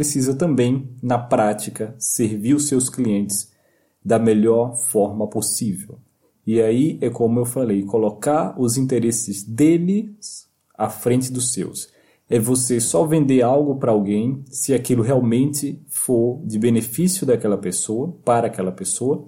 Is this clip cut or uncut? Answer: uncut